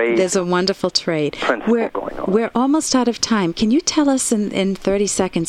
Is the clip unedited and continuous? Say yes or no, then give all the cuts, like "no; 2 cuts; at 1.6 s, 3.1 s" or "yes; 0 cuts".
yes; 0 cuts